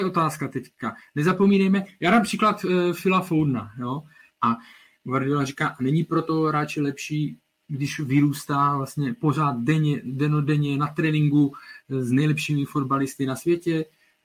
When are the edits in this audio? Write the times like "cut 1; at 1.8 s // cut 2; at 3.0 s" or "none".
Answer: cut 1; at 4.3 s